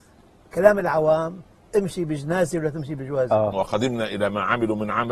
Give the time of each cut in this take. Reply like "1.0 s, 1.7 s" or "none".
3.5 s